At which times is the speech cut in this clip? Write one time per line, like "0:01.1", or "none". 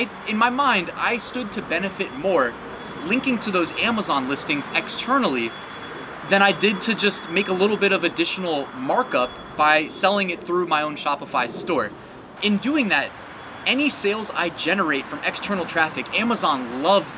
0:12.4